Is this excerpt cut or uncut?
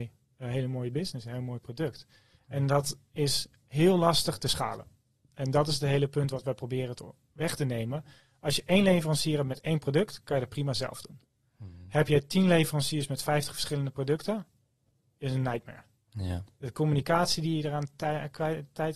uncut